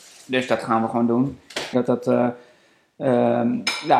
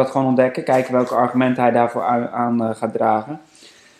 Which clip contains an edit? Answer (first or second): first